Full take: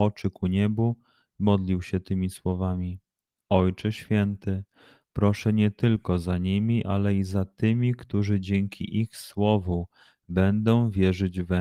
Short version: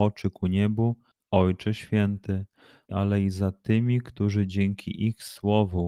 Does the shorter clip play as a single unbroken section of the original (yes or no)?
no